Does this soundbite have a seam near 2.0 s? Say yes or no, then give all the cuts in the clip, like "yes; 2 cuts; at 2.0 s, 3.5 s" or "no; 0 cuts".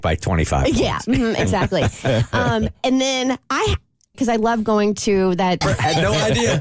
no; 2 cuts; at 4.1 s, 5.6 s